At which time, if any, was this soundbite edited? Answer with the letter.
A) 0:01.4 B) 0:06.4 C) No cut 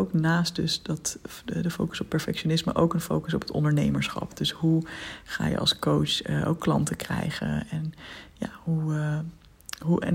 C